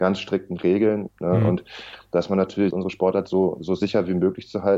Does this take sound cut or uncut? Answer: cut